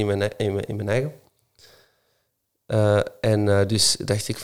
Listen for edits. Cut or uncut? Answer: uncut